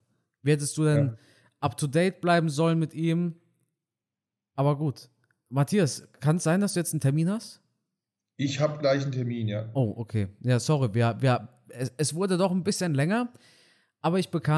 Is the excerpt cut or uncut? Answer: uncut